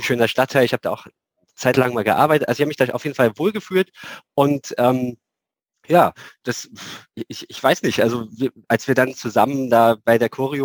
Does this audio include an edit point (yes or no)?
no